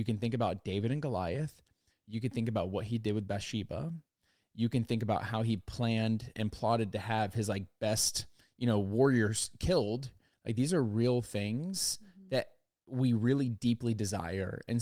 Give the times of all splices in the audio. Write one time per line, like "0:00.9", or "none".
0:10.3